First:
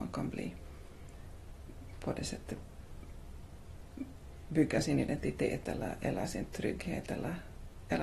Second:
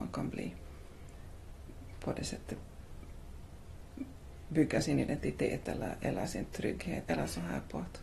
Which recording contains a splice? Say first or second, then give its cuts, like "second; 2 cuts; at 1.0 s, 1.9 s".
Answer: second; 1 cut; at 7.0 s